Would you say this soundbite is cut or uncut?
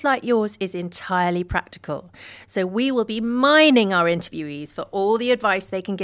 uncut